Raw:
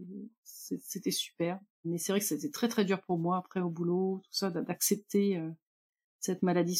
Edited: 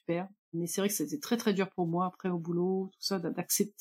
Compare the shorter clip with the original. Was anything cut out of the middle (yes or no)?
no